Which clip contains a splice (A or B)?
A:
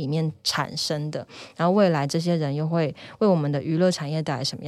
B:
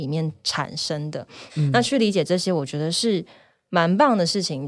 B